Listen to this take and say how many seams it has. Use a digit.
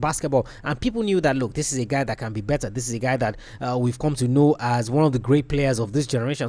0